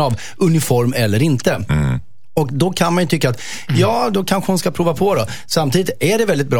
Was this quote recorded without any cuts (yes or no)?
yes